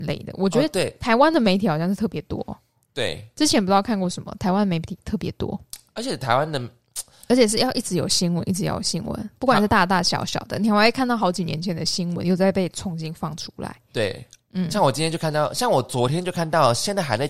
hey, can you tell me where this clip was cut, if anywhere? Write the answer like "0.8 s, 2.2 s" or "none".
none